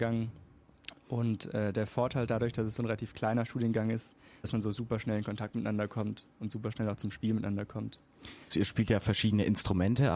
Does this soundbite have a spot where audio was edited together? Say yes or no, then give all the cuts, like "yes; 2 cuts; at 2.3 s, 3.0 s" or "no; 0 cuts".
yes; 2 cuts; at 4.4 s, 8.5 s